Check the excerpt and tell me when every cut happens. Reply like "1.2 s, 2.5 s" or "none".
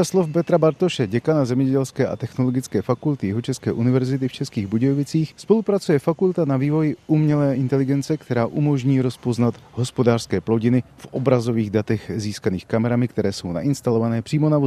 none

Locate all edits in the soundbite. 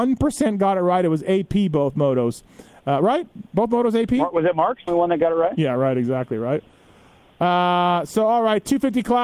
4.9 s

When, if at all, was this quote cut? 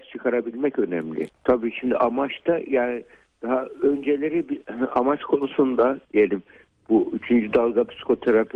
1.3 s

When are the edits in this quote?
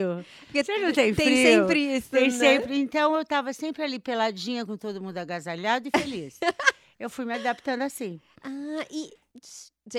none

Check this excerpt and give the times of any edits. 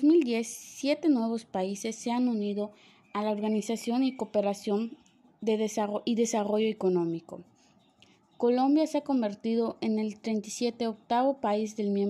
none

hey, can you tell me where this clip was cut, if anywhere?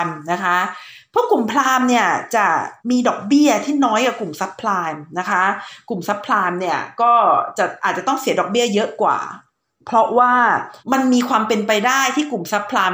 2.8 s, 10.8 s

